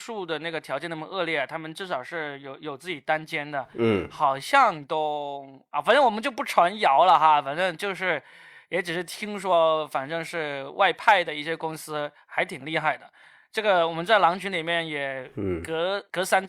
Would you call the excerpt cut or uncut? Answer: uncut